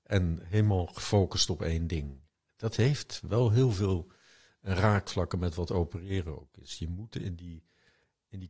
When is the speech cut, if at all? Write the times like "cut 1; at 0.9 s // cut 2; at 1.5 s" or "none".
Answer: none